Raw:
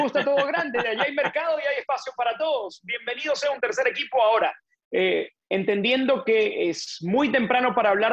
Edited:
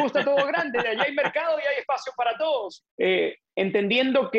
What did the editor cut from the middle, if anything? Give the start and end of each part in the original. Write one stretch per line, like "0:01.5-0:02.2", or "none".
0:02.8-0:04.7